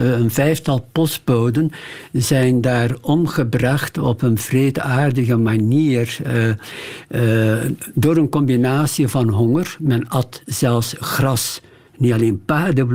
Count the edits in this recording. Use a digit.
1